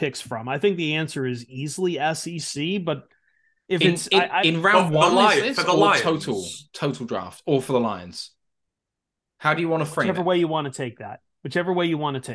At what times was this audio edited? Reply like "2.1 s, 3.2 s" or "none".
none